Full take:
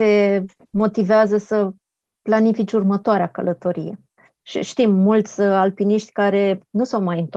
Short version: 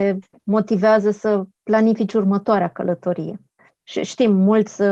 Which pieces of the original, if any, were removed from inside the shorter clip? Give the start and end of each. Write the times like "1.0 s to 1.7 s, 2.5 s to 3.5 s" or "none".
1.8 s to 2.1 s